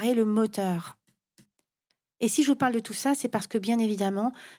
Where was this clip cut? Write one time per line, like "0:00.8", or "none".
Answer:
none